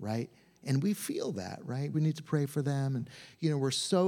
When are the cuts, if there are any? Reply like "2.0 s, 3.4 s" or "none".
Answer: 1.9 s

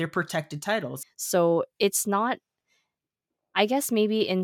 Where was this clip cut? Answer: 1.0 s

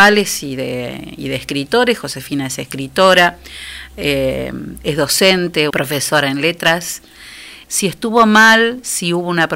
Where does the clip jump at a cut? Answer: 5.7 s, 7.6 s

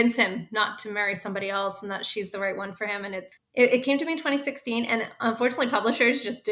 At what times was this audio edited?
3.4 s

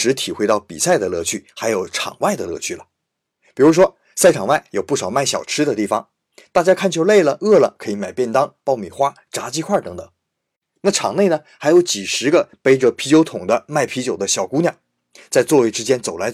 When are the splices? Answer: none

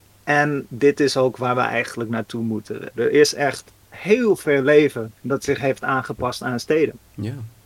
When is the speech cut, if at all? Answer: 2.9 s, 5.2 s

